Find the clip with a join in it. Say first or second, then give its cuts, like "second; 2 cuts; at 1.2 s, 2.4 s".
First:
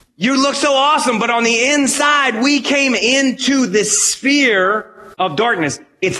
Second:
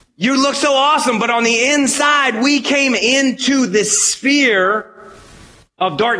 first; 1 cut; at 5.1 s